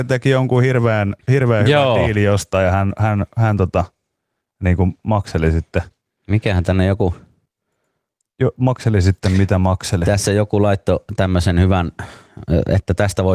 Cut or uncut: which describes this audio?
uncut